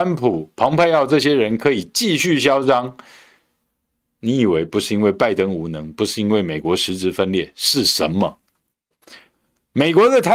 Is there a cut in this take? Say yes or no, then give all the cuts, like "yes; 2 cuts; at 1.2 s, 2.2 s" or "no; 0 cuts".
no; 0 cuts